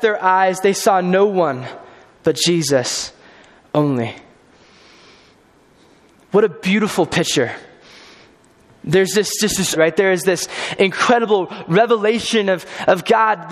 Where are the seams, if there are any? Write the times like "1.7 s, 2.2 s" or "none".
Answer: 9.7 s